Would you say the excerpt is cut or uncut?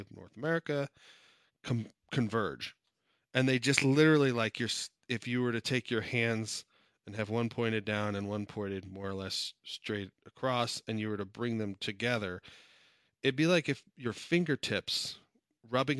uncut